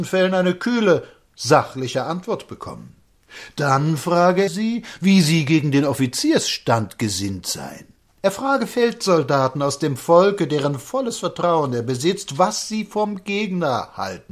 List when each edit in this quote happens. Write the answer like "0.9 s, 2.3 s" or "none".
4.5 s, 8.1 s